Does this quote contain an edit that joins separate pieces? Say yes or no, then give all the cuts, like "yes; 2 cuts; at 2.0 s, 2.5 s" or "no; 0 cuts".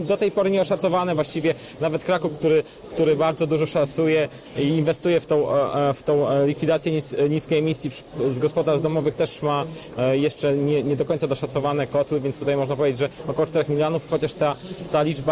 no; 0 cuts